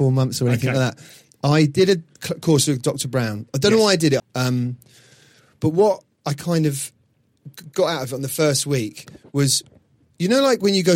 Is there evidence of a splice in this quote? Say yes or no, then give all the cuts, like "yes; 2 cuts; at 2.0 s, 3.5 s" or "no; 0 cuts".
yes; 1 cut; at 4.2 s